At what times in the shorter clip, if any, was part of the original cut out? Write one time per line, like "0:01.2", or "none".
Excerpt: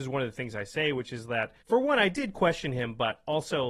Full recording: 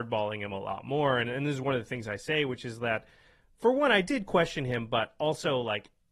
0:01.6